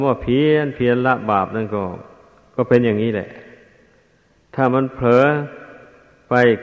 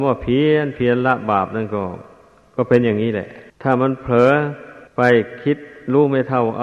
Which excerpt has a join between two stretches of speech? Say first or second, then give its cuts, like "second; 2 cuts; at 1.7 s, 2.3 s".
second; 2 cuts; at 3.5 s, 4.9 s